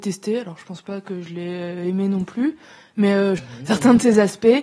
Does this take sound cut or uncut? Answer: cut